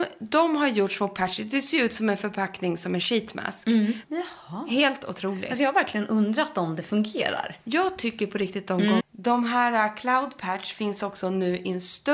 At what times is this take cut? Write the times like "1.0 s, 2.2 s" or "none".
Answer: 4.0 s, 9.0 s